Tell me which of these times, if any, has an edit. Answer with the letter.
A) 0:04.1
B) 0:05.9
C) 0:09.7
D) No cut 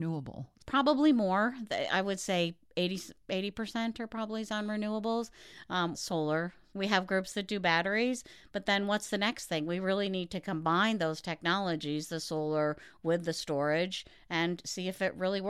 B